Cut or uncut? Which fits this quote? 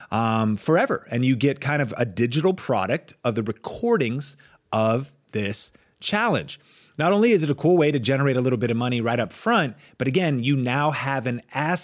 uncut